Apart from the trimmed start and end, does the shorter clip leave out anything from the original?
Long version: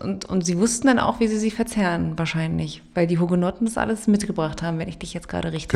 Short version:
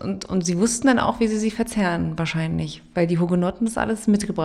no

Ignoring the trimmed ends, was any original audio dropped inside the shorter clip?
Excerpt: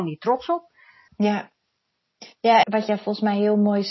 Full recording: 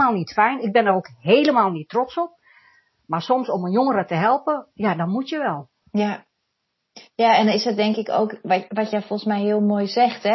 yes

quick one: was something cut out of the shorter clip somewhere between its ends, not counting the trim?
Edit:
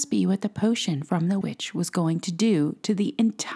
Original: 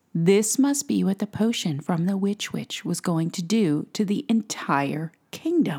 yes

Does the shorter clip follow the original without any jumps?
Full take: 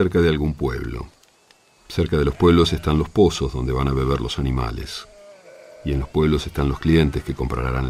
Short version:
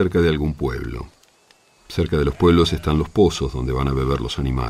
yes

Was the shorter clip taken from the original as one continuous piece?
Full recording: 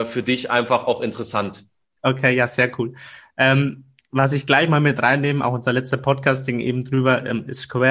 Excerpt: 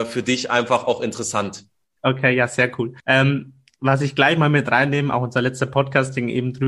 no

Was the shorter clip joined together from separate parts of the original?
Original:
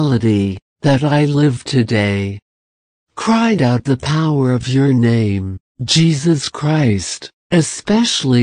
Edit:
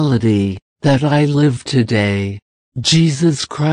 yes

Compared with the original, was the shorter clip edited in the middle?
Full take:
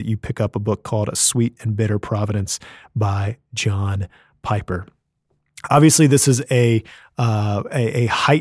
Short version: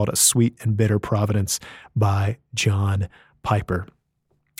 no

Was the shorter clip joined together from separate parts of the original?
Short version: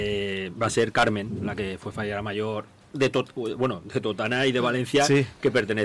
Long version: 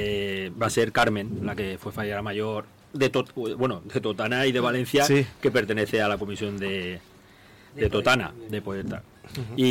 no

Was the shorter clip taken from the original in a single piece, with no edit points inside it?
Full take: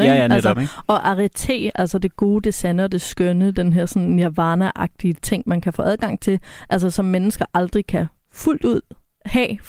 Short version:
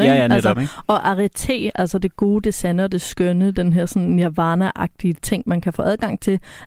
yes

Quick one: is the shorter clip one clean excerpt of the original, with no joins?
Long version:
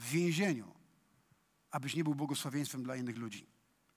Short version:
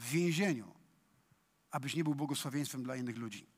yes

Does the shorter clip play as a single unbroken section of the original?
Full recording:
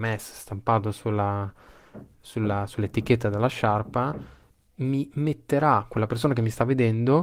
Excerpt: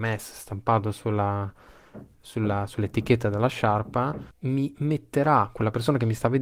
no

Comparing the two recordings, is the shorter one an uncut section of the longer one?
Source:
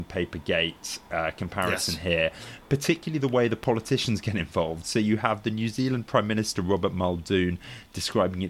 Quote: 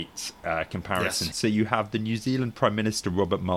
no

